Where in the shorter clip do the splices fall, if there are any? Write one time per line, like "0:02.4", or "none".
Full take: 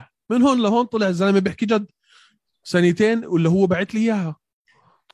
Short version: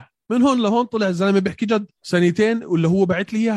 0:02.0